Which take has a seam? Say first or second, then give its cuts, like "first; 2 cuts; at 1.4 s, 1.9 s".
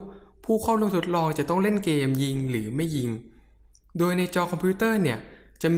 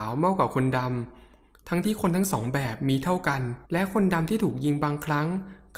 second; 2 cuts; at 1.8 s, 3.6 s